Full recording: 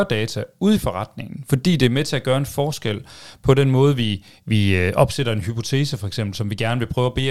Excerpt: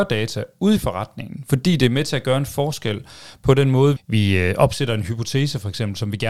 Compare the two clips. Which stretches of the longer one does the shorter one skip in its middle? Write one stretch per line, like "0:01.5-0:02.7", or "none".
0:04.0-0:04.3